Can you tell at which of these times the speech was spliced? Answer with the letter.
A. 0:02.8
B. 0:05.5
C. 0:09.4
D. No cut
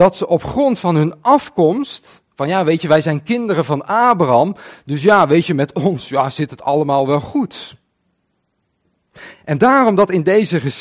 D